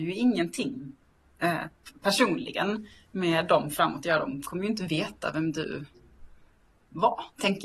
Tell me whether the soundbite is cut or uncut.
uncut